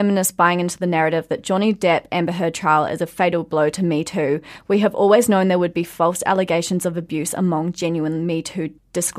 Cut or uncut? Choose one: uncut